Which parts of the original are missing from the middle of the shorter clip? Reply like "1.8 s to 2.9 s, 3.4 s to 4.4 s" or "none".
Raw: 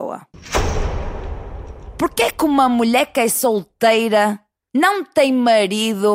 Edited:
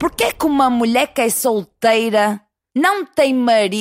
none